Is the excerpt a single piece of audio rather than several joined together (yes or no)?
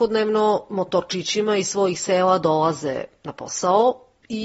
yes